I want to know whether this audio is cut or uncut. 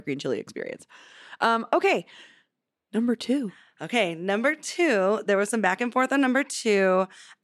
uncut